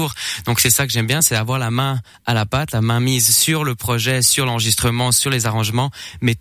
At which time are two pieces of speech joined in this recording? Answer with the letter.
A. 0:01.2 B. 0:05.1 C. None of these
C